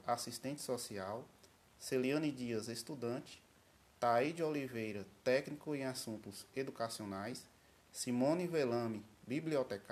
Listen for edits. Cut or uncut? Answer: uncut